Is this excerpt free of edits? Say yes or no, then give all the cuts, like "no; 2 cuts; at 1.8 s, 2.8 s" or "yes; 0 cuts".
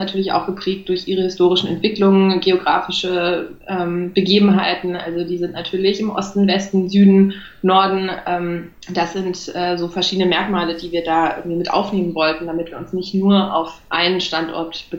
yes; 0 cuts